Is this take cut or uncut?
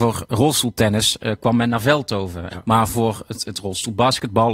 cut